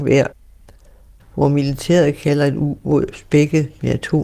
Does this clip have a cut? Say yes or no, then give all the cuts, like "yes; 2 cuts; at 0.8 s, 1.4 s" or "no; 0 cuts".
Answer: no; 0 cuts